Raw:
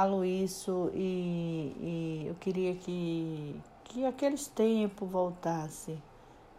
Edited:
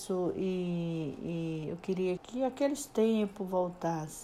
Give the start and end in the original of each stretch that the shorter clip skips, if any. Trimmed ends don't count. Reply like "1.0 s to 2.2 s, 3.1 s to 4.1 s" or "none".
2.8 s to 3.8 s